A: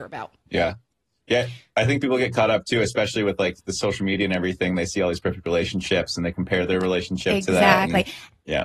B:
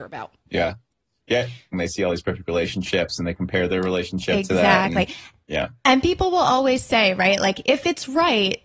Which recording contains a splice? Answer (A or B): B